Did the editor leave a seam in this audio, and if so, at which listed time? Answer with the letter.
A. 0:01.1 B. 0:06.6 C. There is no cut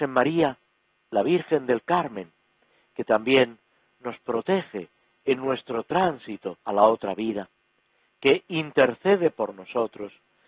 B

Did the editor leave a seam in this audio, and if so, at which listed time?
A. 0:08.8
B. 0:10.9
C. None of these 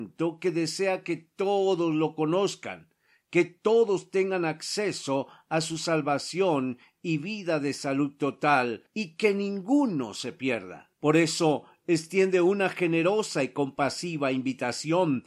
C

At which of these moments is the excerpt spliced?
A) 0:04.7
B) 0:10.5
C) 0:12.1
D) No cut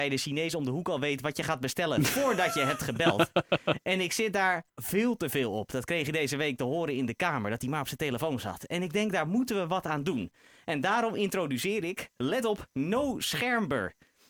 A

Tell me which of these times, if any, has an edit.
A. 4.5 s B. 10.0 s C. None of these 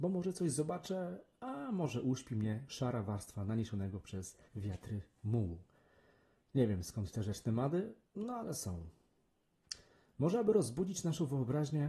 A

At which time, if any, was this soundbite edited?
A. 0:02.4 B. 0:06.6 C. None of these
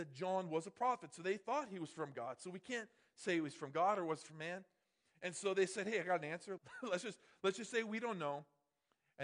B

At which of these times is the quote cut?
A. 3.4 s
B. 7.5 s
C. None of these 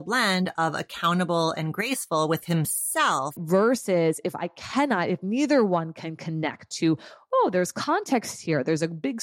A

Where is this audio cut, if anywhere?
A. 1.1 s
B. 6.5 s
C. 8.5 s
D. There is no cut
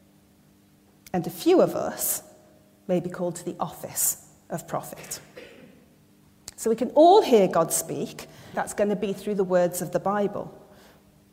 C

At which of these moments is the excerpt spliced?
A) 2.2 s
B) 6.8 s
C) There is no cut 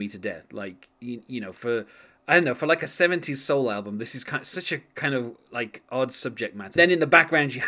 B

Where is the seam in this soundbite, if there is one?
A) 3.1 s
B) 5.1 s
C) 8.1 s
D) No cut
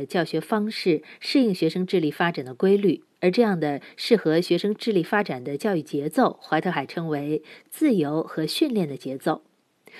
A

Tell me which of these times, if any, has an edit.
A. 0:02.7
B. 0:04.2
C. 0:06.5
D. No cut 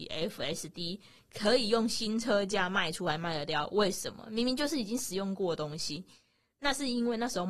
D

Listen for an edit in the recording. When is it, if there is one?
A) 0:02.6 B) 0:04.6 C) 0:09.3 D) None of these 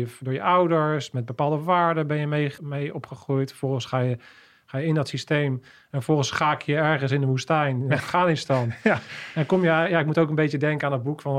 A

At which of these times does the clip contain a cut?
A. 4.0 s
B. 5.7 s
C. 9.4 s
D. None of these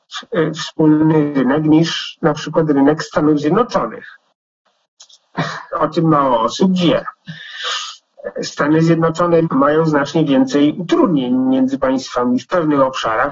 C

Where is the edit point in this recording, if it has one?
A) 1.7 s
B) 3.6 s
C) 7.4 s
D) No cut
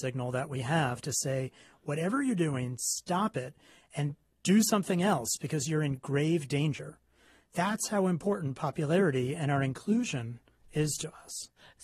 D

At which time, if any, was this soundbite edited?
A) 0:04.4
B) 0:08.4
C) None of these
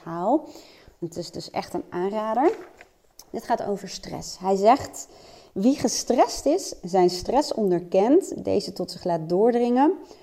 C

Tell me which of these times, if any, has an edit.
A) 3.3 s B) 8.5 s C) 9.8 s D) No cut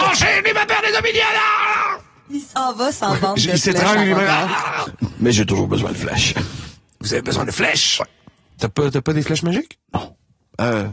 C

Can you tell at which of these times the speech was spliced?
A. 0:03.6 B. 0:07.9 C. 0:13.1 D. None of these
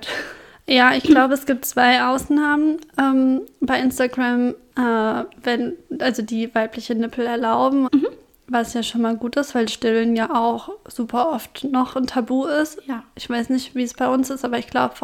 B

